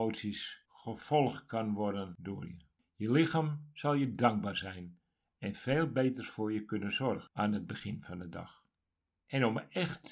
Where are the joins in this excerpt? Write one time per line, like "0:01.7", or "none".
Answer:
none